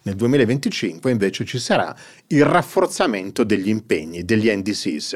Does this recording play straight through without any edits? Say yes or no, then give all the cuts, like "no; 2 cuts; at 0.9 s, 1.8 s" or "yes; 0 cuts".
yes; 0 cuts